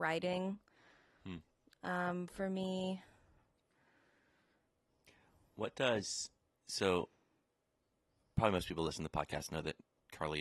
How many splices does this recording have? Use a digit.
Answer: 0